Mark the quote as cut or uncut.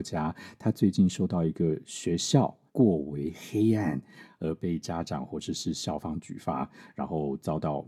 cut